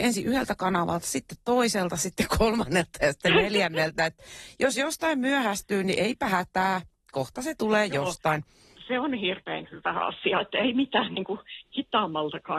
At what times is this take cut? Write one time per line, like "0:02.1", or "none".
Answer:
0:08.8